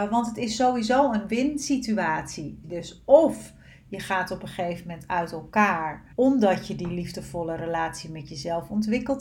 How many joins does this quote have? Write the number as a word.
two